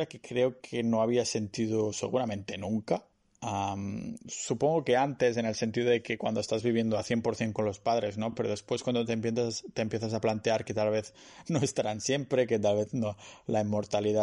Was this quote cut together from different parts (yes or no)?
no